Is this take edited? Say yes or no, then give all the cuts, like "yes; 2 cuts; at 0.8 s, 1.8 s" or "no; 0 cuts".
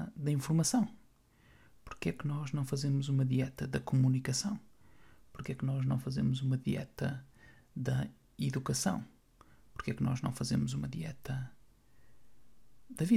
no; 0 cuts